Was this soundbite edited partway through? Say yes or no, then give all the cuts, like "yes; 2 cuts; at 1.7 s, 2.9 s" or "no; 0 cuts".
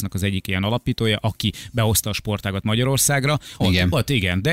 yes; 1 cut; at 3.6 s